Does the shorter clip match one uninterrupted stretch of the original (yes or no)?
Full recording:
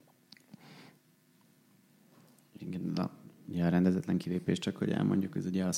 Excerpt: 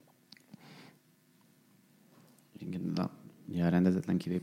yes